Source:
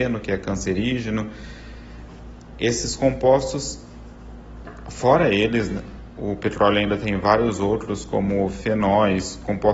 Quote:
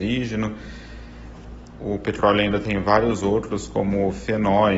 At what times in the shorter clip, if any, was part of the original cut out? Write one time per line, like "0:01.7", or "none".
0:01.8